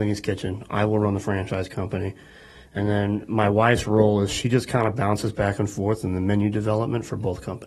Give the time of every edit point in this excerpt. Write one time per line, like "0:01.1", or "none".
none